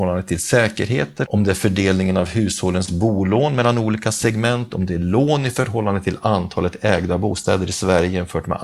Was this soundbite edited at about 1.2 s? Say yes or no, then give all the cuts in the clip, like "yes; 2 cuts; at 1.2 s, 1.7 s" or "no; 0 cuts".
yes; 1 cut; at 1.2 s